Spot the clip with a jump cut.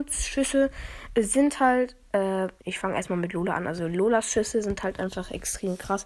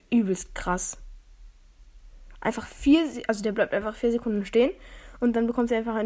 first; 1 cut; at 2.6 s

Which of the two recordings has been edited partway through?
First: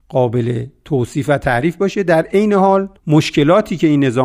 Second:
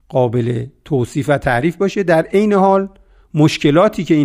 first; 1 cut; at 3.0 s

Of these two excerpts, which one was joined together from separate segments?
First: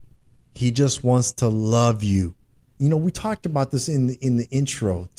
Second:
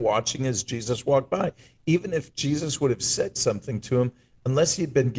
first; 1 cut; at 2.8 s

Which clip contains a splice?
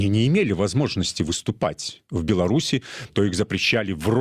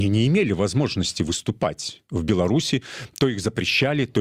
first; 1 cut; at 3.1 s

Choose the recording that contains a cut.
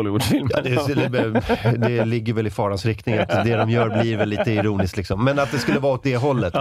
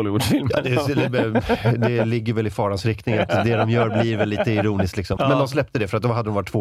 second; 1 cut; at 5.2 s

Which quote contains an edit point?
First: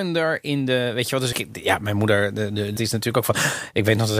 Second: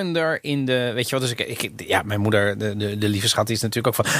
first; 2 cuts; at 1.3 s, 2.8 s

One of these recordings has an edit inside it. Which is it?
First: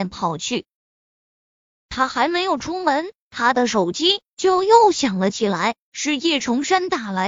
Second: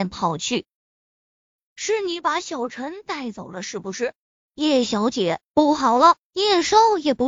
second; 2 cuts; at 1.6 s, 4.5 s

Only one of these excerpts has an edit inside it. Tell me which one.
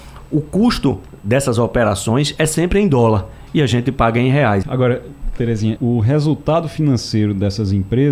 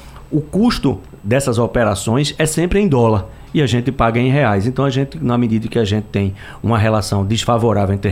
first; 2 cuts; at 4.6 s, 5.8 s

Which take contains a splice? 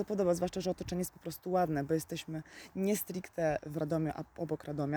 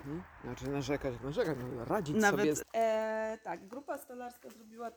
second; 1 cut; at 2.6 s

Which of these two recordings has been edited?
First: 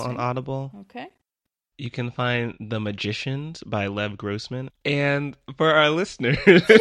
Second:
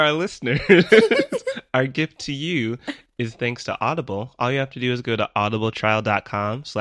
first; 1 cut; at 4.7 s

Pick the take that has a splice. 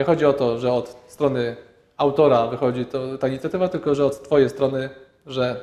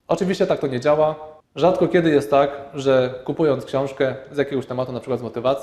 second; 1 cut; at 1.4 s

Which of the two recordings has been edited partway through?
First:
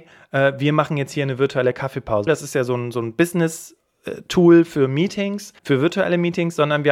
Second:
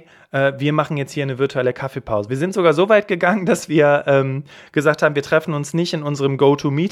first; 2 cuts; at 2.3 s, 5.6 s

